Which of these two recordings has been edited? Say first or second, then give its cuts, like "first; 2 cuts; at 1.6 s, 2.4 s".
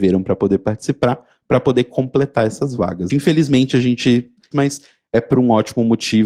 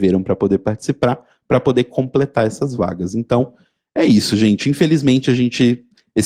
first; 2 cuts; at 3.1 s, 4.5 s